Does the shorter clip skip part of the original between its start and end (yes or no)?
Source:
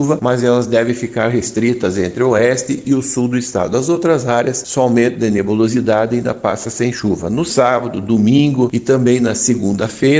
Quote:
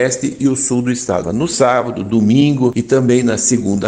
yes